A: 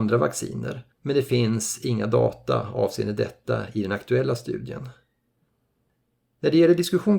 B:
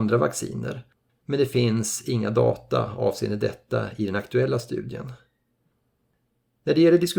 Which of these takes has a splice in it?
A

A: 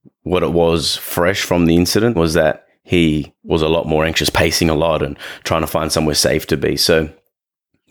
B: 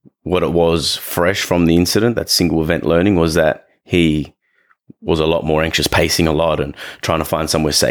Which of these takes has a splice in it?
A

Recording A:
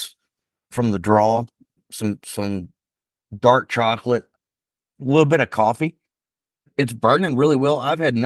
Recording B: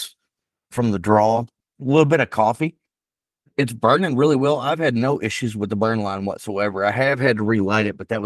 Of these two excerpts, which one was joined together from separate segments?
B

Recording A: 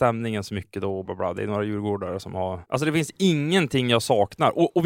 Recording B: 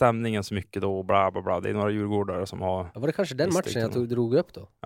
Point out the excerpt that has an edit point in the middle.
A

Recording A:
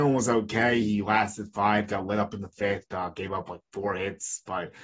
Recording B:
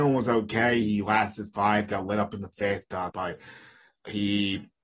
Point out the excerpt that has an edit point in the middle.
B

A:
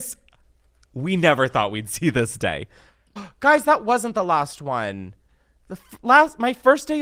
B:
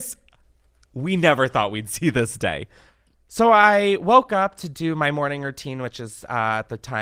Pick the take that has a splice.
A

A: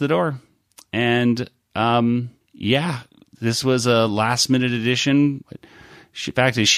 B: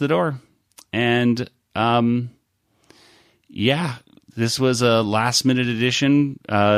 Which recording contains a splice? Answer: A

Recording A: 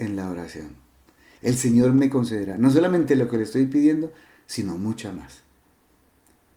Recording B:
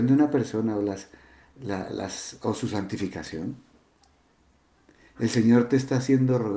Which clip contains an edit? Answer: A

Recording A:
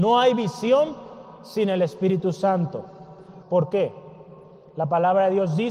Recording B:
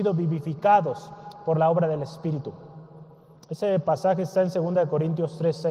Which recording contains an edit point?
A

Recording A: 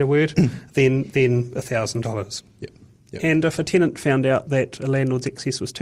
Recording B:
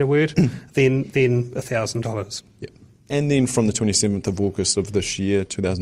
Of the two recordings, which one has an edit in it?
B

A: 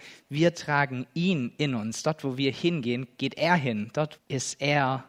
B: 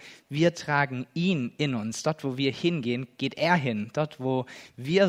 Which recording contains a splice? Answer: A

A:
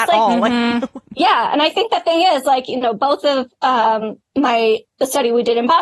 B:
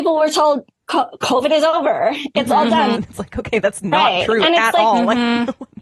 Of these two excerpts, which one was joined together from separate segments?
B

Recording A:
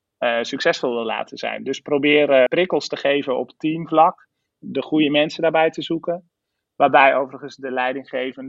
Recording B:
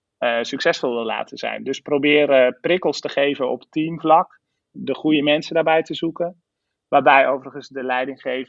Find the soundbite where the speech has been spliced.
A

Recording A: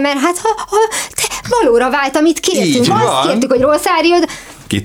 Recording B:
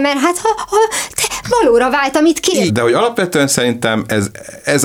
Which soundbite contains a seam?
B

